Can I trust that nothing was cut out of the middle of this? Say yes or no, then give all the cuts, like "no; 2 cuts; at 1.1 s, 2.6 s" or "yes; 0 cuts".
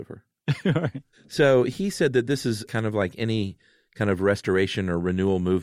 no; 1 cut; at 2.7 s